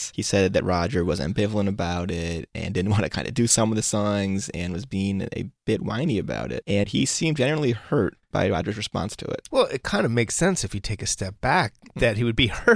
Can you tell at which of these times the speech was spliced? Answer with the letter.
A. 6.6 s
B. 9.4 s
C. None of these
C